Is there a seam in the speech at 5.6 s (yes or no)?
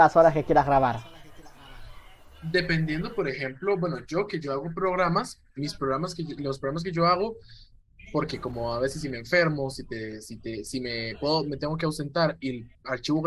yes